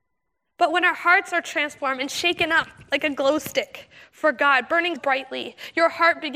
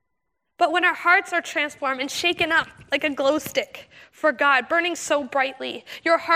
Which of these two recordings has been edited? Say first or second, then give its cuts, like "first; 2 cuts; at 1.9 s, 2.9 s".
first; 1 cut; at 5.0 s